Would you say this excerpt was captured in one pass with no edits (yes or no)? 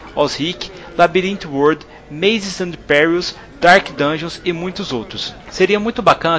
yes